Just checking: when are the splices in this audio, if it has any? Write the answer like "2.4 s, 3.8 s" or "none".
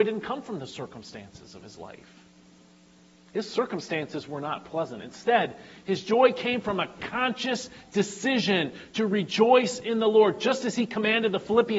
none